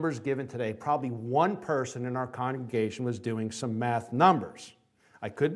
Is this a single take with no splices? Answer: yes; 0 cuts

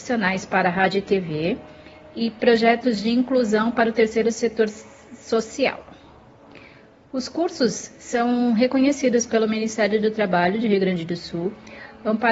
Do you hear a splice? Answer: no; 0 cuts

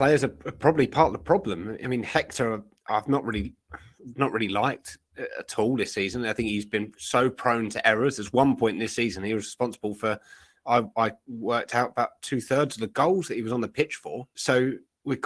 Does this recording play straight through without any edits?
no; 1 cut; at 14.3 s

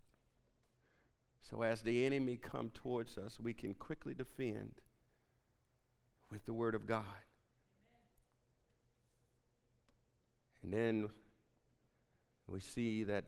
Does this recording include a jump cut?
yes; 1 cut; at 1.3 s

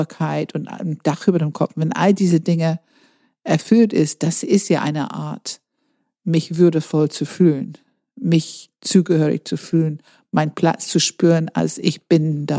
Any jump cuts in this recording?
no; 0 cuts

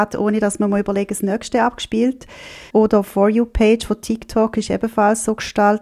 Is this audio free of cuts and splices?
no; 1 cut; at 2.7 s

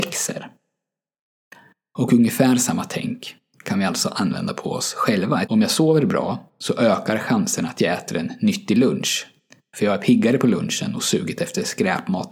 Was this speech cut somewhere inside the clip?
yes; 1 cut; at 5.4 s

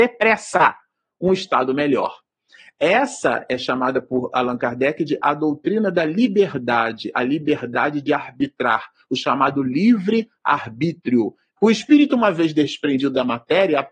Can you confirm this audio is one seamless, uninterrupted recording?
no; 1 cut; at 11.6 s

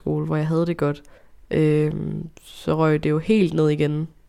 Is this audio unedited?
yes; 0 cuts

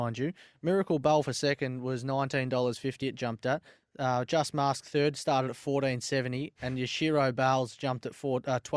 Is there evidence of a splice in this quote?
no; 0 cuts

